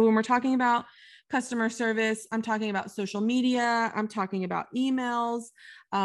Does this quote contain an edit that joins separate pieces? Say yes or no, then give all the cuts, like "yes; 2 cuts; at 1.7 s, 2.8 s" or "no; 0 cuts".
no; 0 cuts